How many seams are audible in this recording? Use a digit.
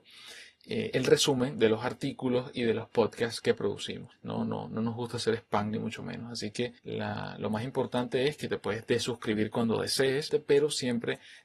3